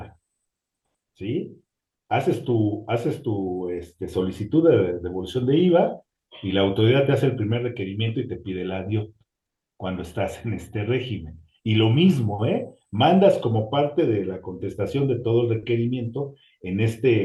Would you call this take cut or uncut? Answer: uncut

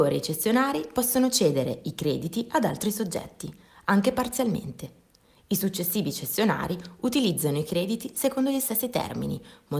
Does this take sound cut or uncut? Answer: uncut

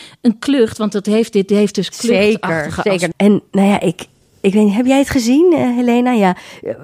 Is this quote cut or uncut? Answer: cut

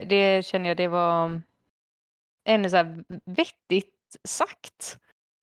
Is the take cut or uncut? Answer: uncut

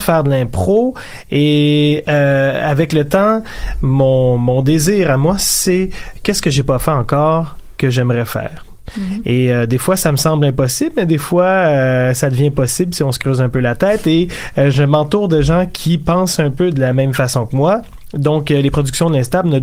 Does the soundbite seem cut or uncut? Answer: uncut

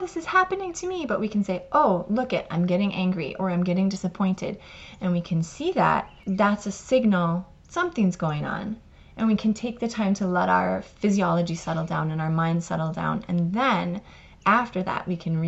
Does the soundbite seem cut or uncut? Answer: uncut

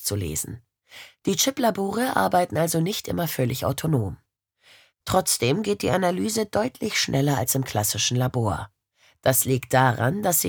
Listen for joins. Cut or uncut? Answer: uncut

